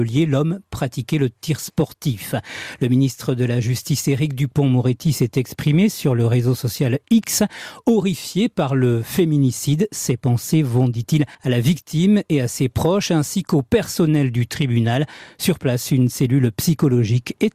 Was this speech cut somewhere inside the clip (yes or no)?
yes